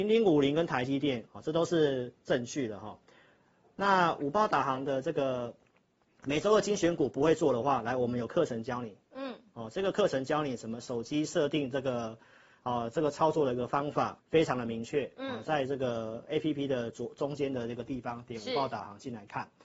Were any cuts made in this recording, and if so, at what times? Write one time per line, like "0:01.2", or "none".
0:01.3
0:14.2